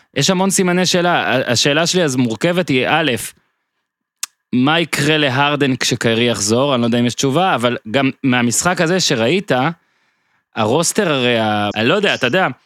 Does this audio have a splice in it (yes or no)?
yes